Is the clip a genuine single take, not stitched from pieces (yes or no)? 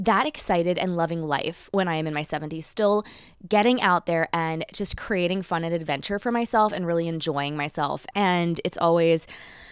no